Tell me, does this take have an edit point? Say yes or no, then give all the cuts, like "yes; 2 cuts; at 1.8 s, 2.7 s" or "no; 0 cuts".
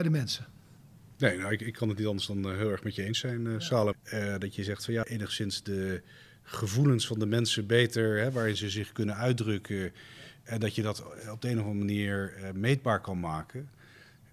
yes; 2 cuts; at 3.9 s, 5.0 s